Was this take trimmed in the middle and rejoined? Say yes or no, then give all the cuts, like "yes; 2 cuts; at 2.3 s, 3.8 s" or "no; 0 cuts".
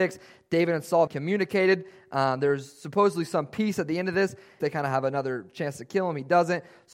yes; 2 cuts; at 1.1 s, 4.6 s